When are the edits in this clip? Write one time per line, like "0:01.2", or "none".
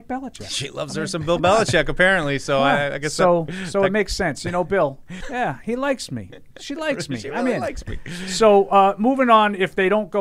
0:05.2